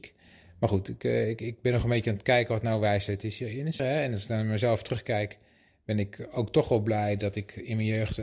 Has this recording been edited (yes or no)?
yes